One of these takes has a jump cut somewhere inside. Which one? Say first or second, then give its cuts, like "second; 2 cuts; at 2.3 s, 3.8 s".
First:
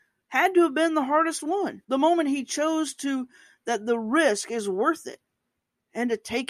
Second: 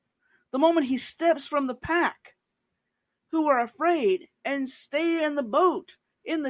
first; 1 cut; at 1.8 s